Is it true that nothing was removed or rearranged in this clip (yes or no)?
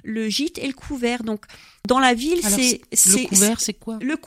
yes